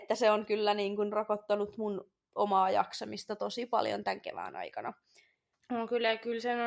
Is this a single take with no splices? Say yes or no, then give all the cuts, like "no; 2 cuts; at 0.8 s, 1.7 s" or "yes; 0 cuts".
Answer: no; 1 cut; at 5.5 s